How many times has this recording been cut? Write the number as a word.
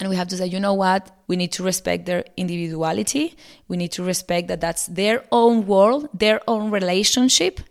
one